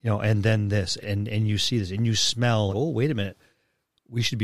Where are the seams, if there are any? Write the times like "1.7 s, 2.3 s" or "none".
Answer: 1.0 s, 2.7 s